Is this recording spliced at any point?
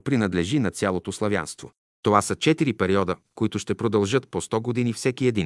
yes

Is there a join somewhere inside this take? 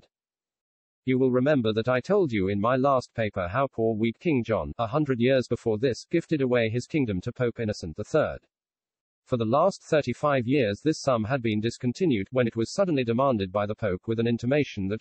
yes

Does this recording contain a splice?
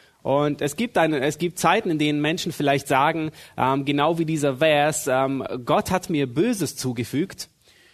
no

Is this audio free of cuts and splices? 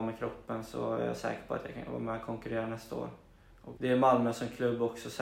no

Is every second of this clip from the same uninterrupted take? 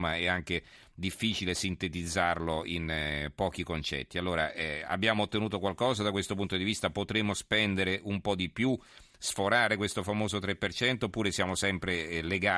yes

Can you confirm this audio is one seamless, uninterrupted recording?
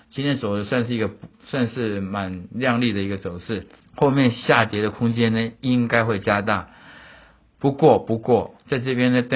no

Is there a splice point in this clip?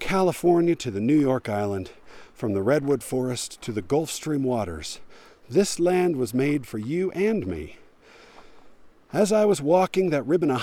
no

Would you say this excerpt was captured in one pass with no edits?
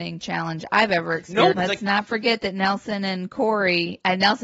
no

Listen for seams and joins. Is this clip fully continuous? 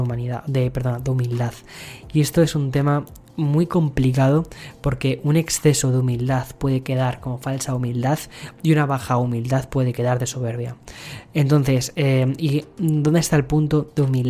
yes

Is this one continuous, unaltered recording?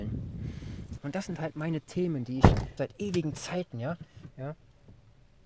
no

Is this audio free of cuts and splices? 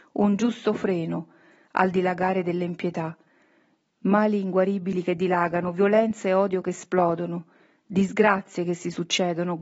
yes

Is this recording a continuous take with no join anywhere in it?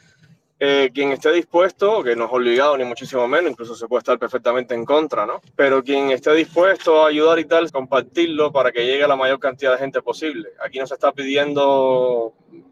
no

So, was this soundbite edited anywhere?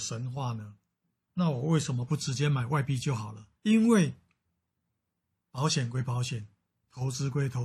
yes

